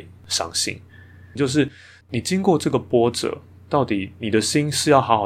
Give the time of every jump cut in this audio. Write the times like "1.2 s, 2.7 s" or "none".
1.4 s